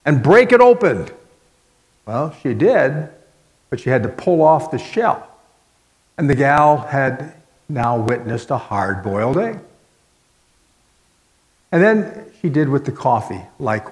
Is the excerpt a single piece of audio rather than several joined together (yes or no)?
yes